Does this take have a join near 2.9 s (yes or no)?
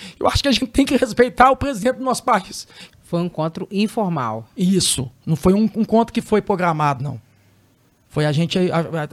yes